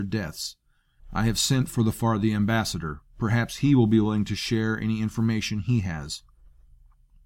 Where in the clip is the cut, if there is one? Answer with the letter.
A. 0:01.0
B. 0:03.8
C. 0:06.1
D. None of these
A